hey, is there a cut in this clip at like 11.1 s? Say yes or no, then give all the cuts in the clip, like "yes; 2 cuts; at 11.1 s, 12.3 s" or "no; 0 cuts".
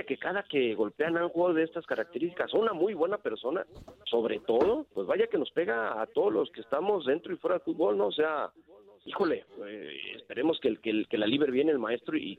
no; 1 cut; at 4.9 s